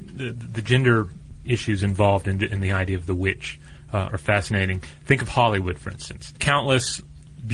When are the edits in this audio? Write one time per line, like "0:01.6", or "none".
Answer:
0:04.1